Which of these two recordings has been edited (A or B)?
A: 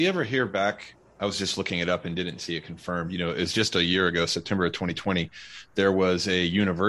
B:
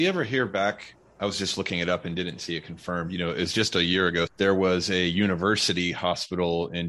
B